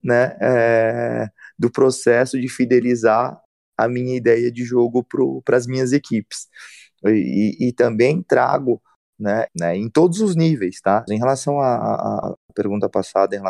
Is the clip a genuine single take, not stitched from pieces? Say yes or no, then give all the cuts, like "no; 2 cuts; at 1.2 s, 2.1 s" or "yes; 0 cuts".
no; 2 cuts; at 9.5 s, 11.1 s